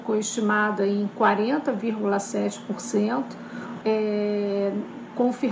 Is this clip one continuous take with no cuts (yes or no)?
no